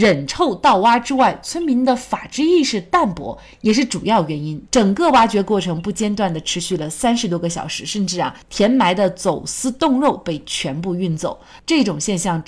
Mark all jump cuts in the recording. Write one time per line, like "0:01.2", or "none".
0:04.7